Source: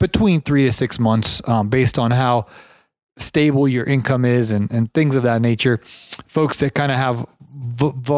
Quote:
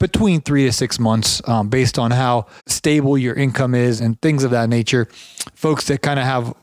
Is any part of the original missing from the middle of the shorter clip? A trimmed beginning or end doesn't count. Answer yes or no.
yes